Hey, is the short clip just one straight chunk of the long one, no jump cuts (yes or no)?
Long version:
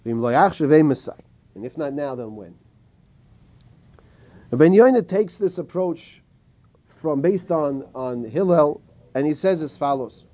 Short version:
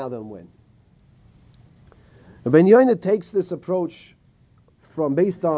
yes